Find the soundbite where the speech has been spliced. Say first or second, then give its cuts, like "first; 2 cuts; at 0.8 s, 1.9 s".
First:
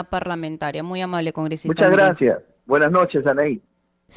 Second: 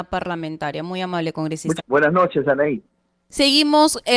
second; 1 cut; at 1.8 s